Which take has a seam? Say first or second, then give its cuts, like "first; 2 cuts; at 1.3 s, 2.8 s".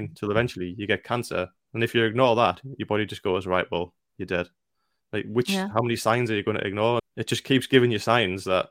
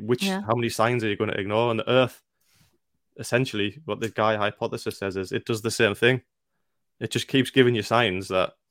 first; 1 cut; at 7.0 s